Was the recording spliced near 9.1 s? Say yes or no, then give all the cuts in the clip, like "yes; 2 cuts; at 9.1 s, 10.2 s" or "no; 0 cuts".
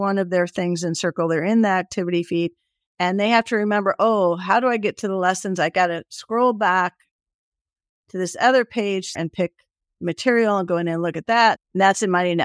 yes; 2 cuts; at 9.1 s, 11.6 s